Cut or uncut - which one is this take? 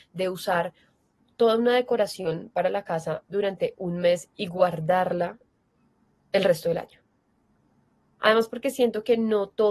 cut